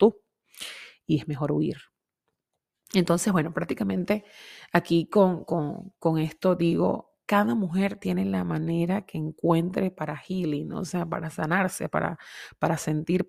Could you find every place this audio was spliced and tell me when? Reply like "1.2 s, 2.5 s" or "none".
none

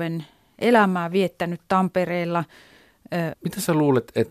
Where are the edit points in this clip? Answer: 3.3 s

